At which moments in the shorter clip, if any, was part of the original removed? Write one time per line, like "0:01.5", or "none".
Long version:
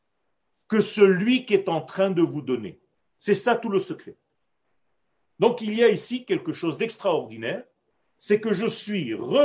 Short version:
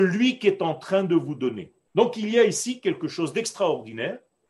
0:01.9